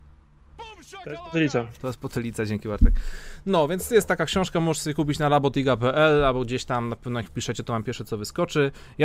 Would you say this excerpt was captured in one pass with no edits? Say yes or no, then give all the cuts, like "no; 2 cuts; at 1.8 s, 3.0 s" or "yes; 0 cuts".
yes; 0 cuts